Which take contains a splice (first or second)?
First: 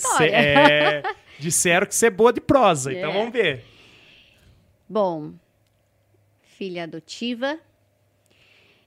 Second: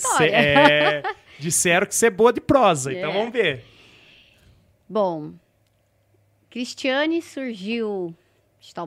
first